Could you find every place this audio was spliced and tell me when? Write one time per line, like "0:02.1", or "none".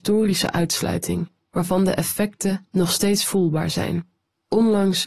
none